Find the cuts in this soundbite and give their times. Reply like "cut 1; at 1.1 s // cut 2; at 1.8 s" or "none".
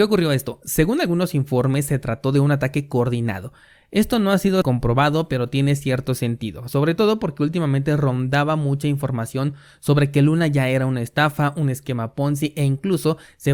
cut 1; at 4.6 s